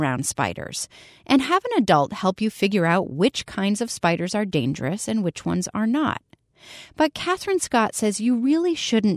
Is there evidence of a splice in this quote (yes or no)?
no